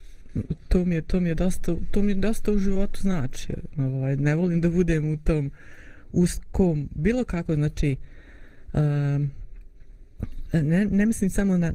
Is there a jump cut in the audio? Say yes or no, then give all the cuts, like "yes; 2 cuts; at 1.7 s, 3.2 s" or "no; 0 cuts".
no; 0 cuts